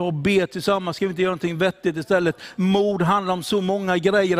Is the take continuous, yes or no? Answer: yes